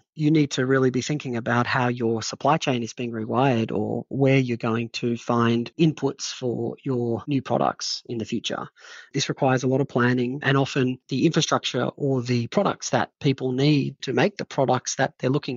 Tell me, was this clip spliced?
no; 0 cuts

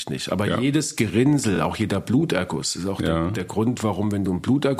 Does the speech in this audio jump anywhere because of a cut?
no; 0 cuts

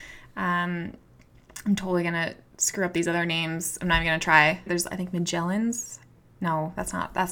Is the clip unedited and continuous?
no; 1 cut; at 4.7 s

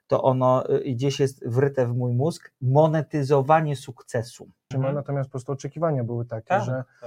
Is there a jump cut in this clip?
yes; 1 cut; at 4.7 s

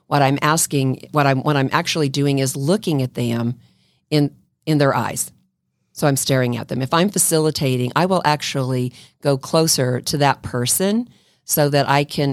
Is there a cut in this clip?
no; 0 cuts

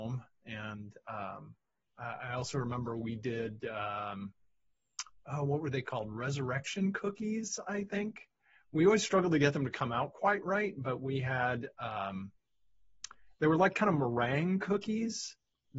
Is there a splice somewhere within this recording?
no; 0 cuts

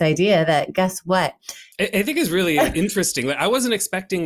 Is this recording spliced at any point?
yes; 1 cut; at 1.7 s

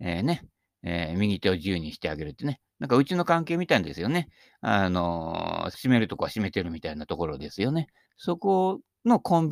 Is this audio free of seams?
no; 2 cuts; at 5.7 s, 8.1 s

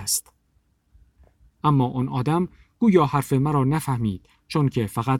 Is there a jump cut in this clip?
no; 0 cuts

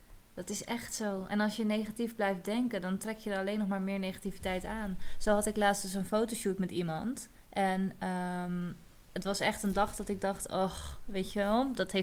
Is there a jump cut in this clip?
yes; 1 cut; at 8.9 s

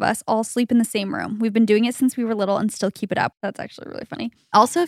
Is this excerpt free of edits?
no; 1 cut; at 3.3 s

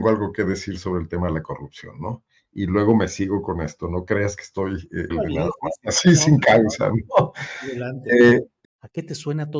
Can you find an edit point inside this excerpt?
yes; 2 cuts; at 5.1 s, 8.6 s

